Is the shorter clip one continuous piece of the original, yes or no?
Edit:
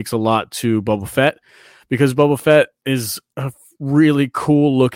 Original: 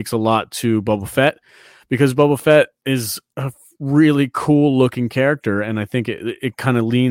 yes